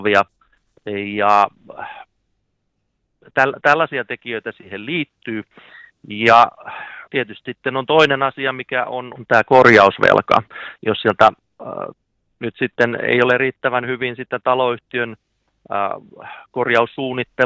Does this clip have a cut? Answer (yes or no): yes